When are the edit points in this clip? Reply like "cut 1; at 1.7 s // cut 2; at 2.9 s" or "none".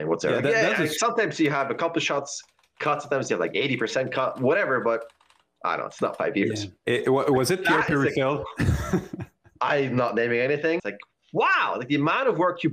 cut 1; at 6.8 s // cut 2; at 10.8 s